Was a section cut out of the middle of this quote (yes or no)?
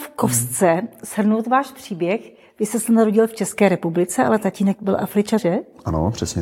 yes